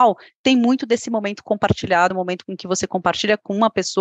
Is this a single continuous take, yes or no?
yes